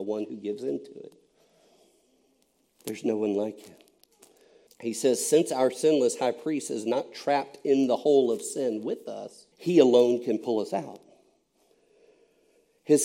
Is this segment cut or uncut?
cut